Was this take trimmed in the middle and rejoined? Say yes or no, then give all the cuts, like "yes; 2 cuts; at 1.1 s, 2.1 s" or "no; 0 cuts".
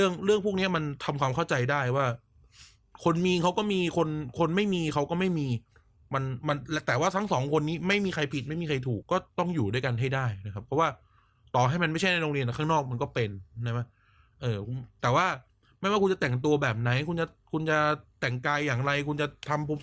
yes; 1 cut; at 9.0 s